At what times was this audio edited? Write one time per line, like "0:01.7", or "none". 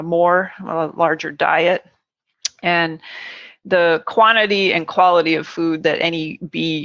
none